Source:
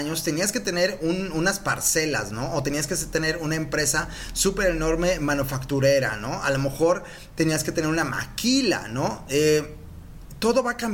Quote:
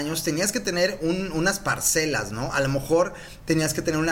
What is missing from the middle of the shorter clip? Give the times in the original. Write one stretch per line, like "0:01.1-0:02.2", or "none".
0:02.5-0:06.4